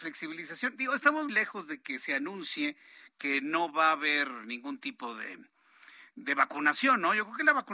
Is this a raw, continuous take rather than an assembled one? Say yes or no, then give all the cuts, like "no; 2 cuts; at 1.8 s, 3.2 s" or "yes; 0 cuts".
no; 1 cut; at 1.3 s